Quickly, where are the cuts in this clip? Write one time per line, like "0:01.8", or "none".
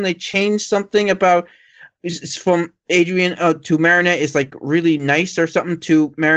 none